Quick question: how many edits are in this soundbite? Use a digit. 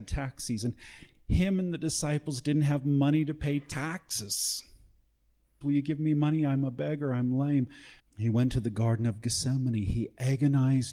2